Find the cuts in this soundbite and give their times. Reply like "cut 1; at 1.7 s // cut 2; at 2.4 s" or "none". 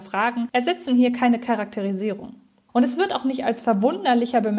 cut 1; at 2.7 s

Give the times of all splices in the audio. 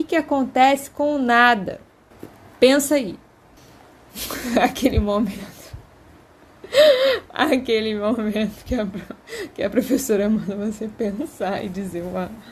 none

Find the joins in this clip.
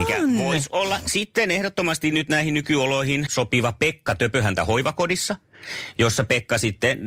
cut 1; at 3.3 s

